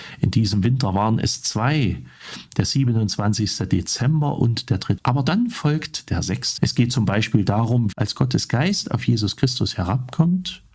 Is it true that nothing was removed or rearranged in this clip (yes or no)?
no